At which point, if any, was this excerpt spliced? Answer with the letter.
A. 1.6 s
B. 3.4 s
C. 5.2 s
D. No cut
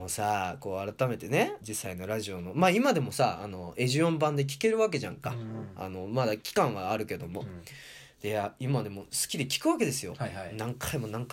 A